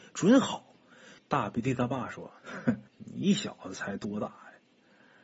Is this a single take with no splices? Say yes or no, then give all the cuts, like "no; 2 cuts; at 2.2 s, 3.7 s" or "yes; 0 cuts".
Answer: no; 2 cuts; at 1.2 s, 2.9 s